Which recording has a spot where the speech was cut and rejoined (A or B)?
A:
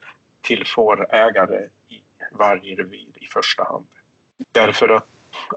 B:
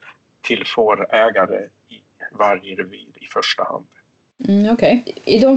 A